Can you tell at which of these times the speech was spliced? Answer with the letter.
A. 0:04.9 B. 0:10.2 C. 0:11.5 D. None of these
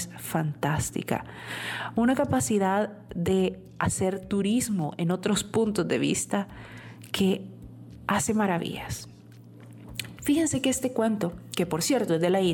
B